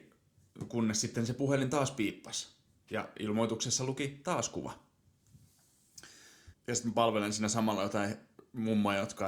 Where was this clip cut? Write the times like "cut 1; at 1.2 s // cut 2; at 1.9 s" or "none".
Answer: cut 1; at 6.5 s